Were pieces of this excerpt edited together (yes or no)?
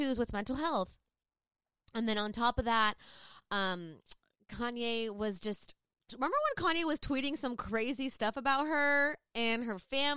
no